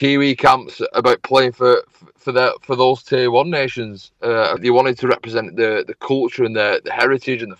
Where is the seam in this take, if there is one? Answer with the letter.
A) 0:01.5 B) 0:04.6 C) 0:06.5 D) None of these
B